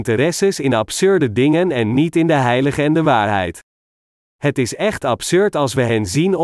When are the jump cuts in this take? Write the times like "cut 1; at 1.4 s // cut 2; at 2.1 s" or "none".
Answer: none